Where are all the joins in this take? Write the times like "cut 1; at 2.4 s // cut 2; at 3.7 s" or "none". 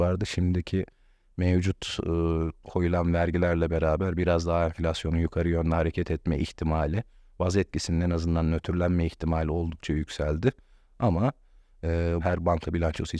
cut 1; at 12.2 s